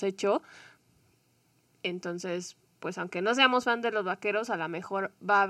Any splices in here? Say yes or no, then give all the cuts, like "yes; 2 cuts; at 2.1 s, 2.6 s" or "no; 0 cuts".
no; 0 cuts